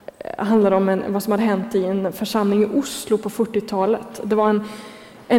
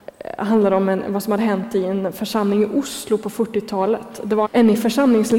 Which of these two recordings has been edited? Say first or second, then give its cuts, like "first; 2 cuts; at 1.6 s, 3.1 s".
second; 1 cut; at 4.4 s